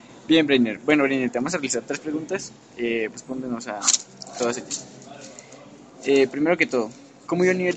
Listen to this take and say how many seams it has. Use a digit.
1